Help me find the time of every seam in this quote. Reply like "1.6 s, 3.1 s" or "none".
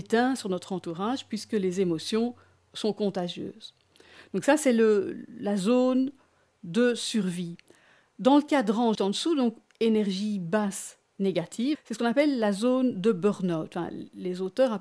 9.0 s, 11.8 s